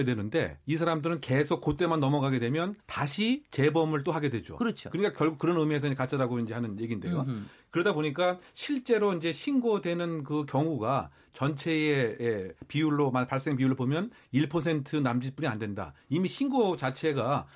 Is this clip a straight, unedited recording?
no; 1 cut; at 2.8 s

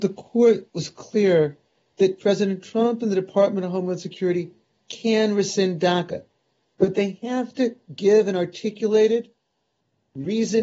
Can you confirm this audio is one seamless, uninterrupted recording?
yes; 0 cuts

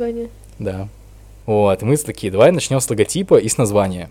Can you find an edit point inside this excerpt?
yes; 1 cut; at 1.4 s

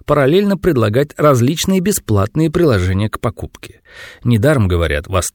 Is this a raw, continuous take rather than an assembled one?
yes; 0 cuts

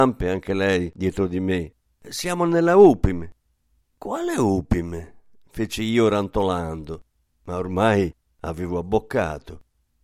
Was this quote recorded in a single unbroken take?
yes; 0 cuts

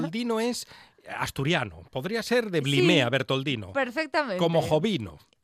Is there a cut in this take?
no; 0 cuts

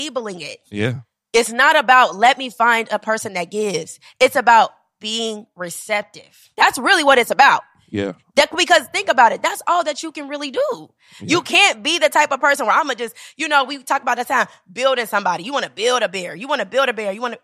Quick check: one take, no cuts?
no; 1 cut; at 6.5 s

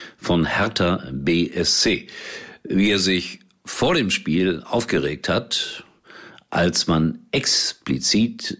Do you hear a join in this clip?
no; 0 cuts

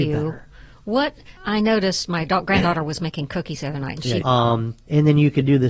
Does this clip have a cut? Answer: yes; 2 cuts; at 1.4 s, 4.2 s

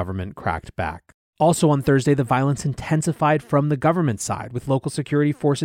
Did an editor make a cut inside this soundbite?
yes; 1 cut; at 1.2 s

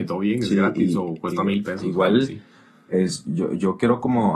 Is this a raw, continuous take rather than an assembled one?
yes; 0 cuts

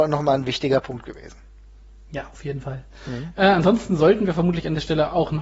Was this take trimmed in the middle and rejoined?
no; 0 cuts

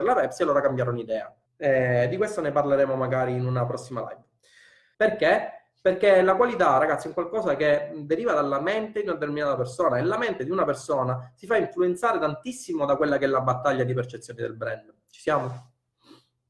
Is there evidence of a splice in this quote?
yes; 2 cuts; at 1.5 s, 4.9 s

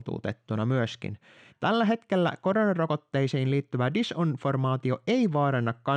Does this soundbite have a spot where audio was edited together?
yes; 1 cut; at 1.5 s

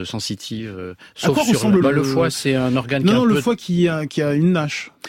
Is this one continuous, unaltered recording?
no; 1 cut; at 1.8 s

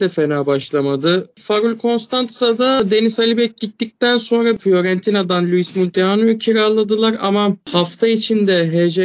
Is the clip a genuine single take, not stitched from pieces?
no; 1 cut; at 1.3 s

